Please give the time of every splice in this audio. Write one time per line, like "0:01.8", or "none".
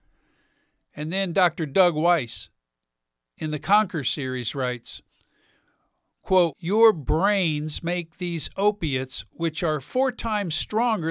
0:06.5